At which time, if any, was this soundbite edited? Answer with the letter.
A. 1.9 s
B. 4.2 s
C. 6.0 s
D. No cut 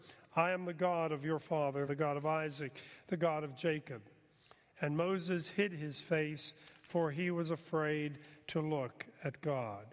A